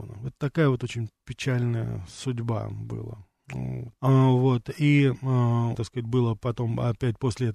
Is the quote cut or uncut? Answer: cut